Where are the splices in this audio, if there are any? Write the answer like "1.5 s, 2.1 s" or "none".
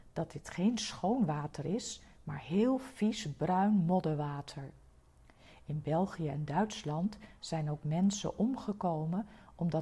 none